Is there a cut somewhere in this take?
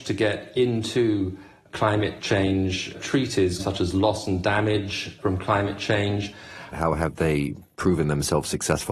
yes; 2 cuts; at 3.6 s, 6.7 s

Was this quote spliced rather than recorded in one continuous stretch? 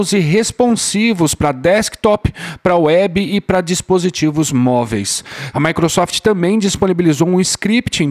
yes; 1 cut; at 5.5 s

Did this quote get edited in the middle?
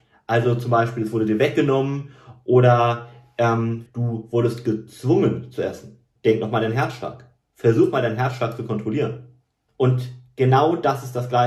yes; 3 cuts; at 3.9 s, 6.2 s, 9.7 s

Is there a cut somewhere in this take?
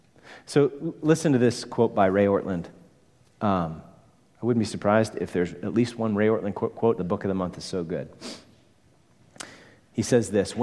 yes; 1 cut; at 7.0 s

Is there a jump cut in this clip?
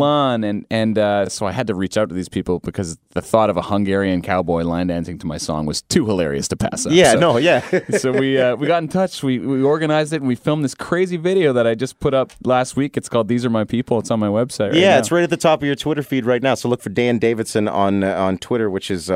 no; 0 cuts

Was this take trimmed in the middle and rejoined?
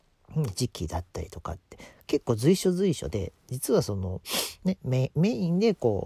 no; 0 cuts

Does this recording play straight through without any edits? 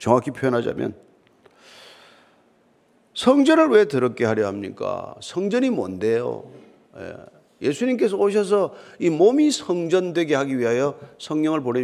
yes; 0 cuts

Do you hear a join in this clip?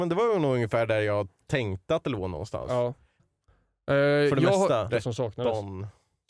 yes; 2 cuts; at 3.2 s, 4.9 s

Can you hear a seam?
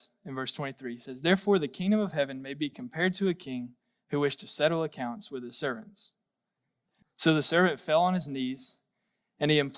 yes; 1 cut; at 7.0 s

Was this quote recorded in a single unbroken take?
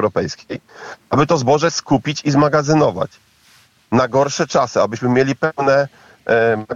yes; 0 cuts

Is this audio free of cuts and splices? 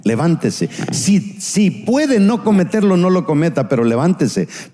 yes; 0 cuts

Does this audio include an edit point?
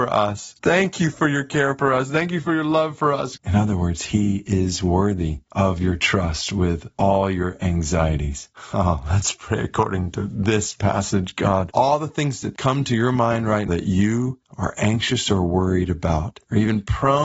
yes; 3 cuts; at 3.4 s, 11.7 s, 13.7 s

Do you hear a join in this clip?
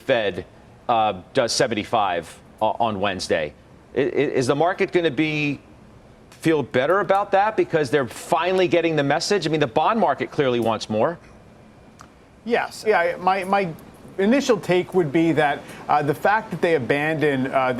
yes; 1 cut; at 12.9 s

